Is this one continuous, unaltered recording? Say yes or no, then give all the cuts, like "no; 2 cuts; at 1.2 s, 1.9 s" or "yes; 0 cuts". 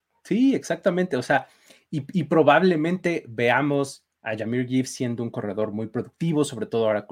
yes; 0 cuts